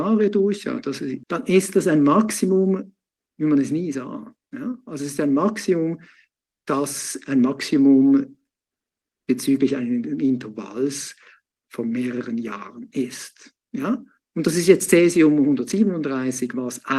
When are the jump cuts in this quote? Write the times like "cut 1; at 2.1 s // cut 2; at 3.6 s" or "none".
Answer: cut 1; at 1.2 s